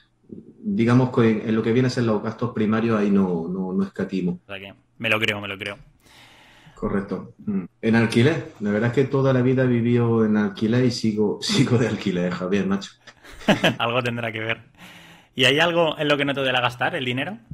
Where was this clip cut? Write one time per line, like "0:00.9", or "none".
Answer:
0:04.5
0:07.6
0:13.7